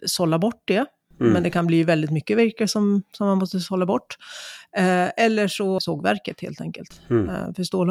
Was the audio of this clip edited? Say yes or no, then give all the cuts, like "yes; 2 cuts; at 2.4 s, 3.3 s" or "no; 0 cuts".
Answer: yes; 1 cut; at 5.8 s